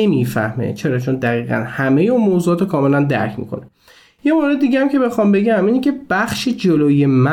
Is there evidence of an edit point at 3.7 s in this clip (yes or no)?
no